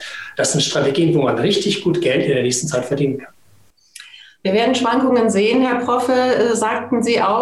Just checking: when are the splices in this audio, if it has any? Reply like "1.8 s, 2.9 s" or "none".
none